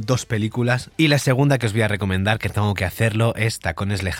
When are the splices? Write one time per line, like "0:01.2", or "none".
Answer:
0:00.9

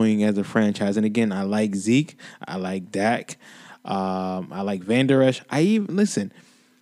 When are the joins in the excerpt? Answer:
none

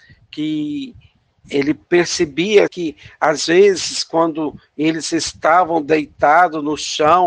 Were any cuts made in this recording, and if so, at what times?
0:02.7

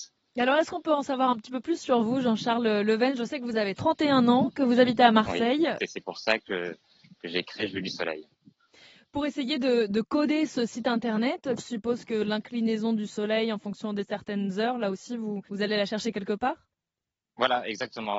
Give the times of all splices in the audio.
0:05.8
0:11.6
0:15.5

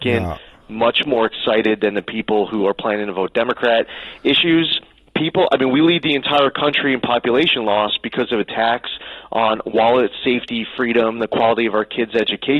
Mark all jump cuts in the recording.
none

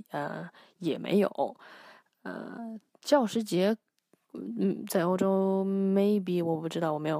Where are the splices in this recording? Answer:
none

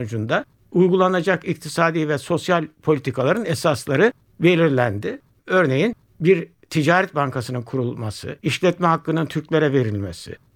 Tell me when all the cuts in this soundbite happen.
0:05.4
0:08.4

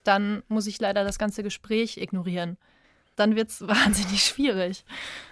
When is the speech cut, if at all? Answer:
none

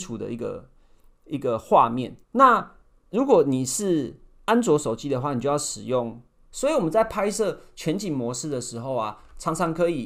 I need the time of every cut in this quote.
0:02.2
0:06.5

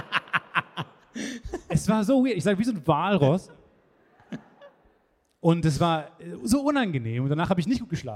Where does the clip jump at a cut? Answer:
none

